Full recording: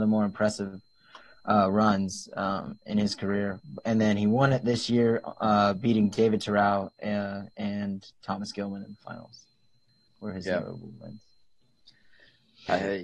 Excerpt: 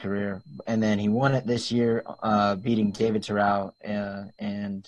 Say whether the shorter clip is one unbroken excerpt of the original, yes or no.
yes